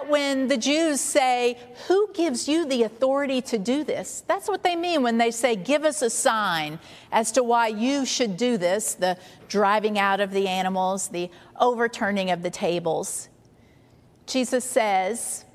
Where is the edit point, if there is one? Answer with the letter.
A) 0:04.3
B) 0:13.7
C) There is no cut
C